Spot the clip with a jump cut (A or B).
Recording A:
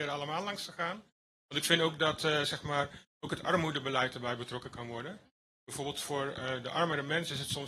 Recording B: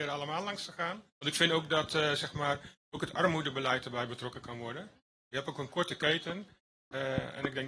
B